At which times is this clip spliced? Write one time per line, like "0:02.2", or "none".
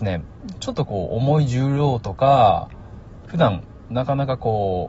0:03.3